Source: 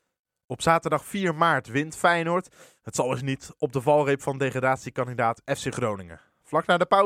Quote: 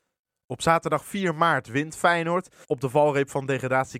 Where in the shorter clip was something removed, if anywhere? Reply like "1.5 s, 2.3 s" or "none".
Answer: 2.6 s